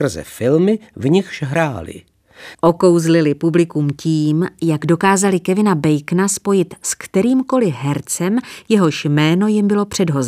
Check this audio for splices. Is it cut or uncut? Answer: cut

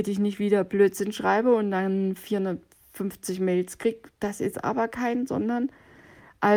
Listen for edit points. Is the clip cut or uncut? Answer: uncut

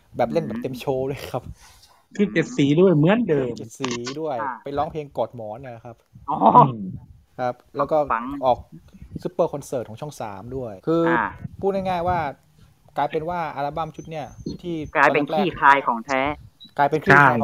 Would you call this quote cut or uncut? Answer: cut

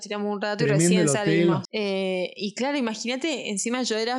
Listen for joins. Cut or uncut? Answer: cut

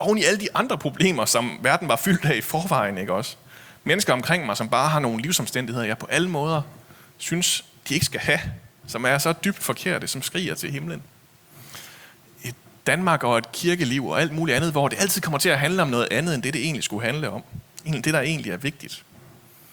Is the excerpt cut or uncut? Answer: uncut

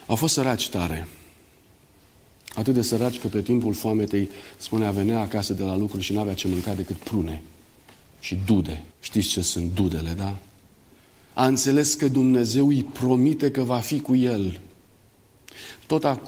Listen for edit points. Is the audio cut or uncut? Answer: cut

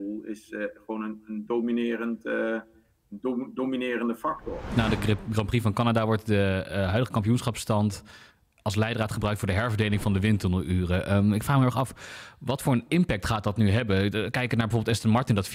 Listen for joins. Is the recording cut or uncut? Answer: uncut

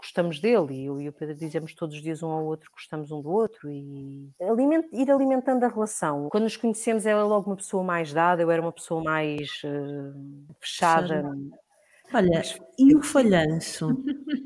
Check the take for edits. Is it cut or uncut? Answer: cut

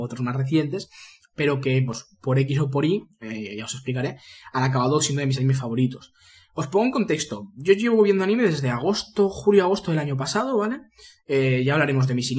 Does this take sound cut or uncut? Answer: uncut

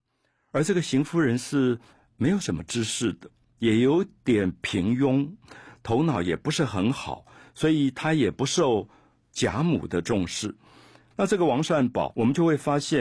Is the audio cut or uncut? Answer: cut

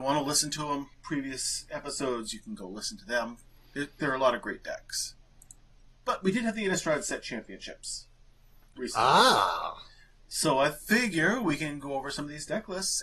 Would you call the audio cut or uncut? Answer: uncut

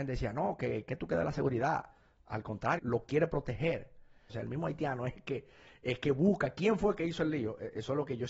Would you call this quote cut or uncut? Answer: cut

